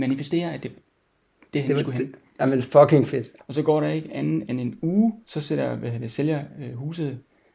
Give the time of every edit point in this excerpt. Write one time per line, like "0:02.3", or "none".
0:03.4
0:05.2